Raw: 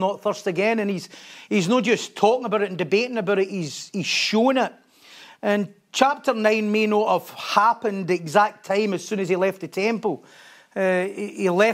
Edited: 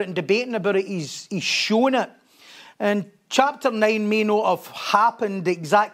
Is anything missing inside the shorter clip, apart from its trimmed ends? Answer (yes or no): no